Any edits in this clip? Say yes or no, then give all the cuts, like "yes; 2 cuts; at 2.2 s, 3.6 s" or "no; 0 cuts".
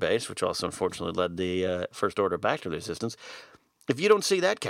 no; 0 cuts